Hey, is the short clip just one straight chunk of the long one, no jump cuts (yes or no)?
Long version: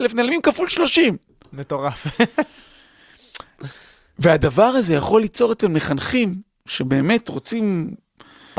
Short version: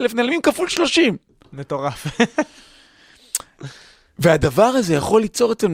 yes